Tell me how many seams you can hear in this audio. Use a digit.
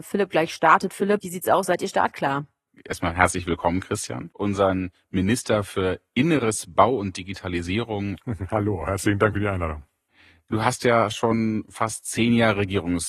1